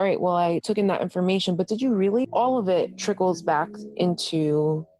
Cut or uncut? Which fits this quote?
cut